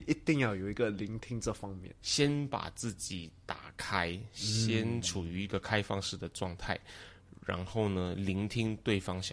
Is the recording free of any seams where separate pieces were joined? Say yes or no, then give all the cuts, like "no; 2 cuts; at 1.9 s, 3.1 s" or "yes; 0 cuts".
no; 1 cut; at 2.0 s